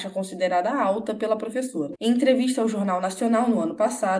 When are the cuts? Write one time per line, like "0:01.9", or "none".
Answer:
0:02.0

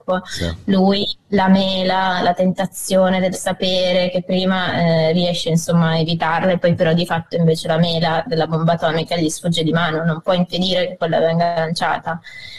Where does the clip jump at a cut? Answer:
0:08.3

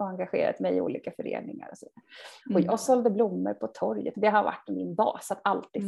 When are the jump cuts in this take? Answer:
0:02.4
0:04.1

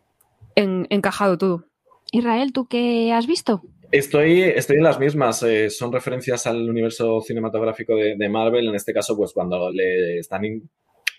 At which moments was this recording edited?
0:09.7

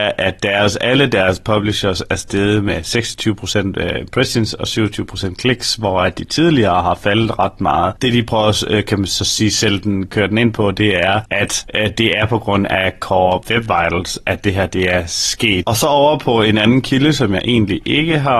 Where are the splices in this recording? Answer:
none

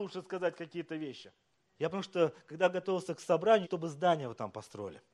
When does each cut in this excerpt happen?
0:01.8
0:03.6

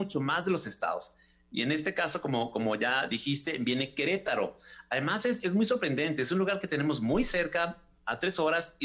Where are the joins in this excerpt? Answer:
none

